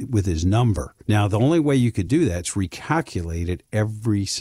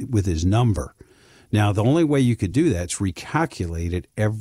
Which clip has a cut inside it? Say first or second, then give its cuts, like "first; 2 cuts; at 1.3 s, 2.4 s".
first; 1 cut; at 1.0 s